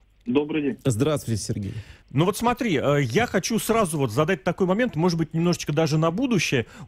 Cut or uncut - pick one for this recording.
cut